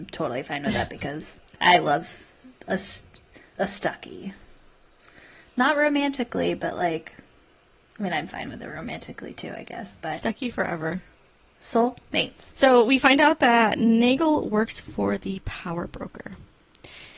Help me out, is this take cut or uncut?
cut